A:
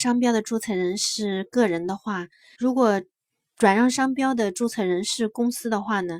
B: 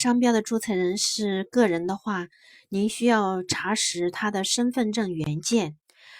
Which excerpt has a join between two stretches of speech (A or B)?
A